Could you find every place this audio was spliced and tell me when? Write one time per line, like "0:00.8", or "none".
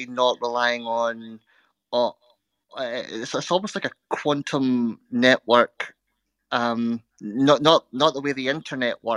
none